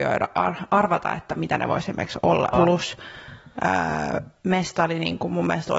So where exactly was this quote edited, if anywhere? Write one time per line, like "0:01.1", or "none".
0:02.5